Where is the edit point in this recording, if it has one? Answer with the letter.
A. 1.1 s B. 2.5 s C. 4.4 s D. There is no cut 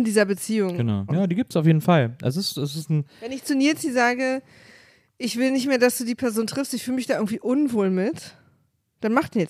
A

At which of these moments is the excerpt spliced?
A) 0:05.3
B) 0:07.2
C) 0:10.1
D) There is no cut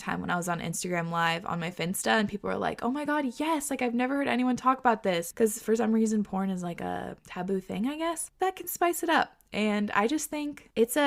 B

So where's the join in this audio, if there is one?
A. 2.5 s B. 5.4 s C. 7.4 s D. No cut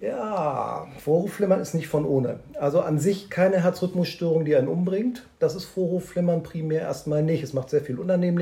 B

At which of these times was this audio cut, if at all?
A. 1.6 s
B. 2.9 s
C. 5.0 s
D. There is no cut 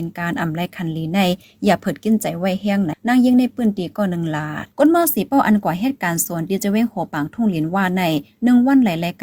B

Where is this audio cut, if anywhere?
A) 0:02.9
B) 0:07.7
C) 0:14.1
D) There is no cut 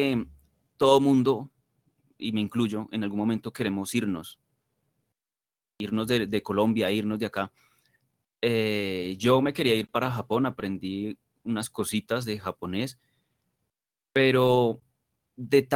D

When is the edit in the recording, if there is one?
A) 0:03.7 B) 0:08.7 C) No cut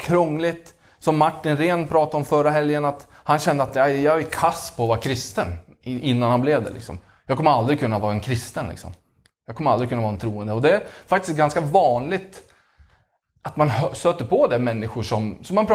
C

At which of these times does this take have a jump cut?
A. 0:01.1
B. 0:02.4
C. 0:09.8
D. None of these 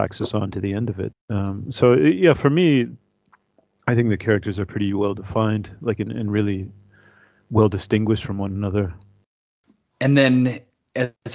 A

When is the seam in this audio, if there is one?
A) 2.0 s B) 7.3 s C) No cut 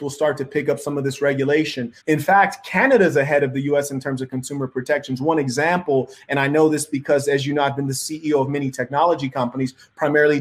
A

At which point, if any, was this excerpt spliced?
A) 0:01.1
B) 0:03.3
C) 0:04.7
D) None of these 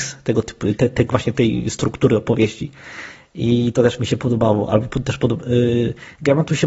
A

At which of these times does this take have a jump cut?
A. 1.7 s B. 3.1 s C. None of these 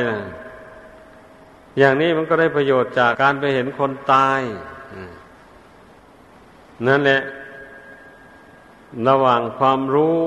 B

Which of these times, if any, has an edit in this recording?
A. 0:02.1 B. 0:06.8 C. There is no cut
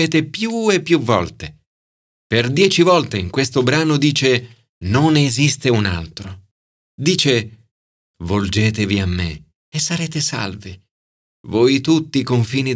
B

